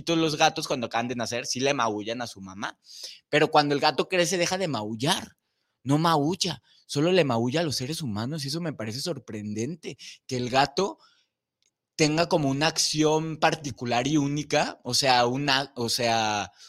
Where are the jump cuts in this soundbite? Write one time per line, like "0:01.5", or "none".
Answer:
none